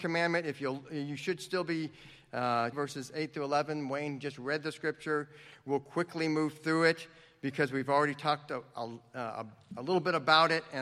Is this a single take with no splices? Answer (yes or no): no